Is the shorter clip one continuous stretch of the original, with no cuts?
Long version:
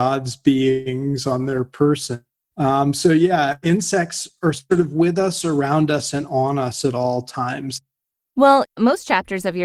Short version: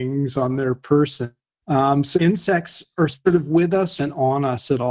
no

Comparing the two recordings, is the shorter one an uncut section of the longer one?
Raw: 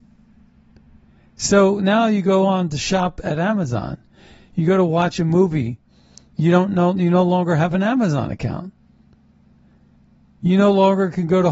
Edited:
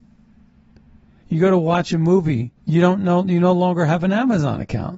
no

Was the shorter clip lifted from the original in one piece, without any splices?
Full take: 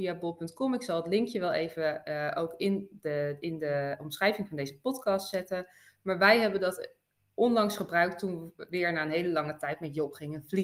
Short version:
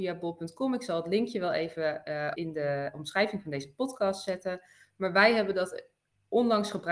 no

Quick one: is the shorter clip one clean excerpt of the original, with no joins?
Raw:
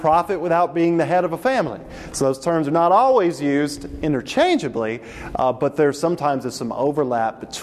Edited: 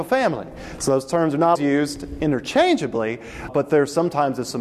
no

